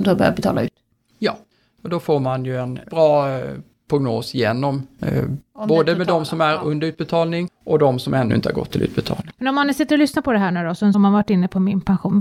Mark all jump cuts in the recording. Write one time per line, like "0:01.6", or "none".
0:10.9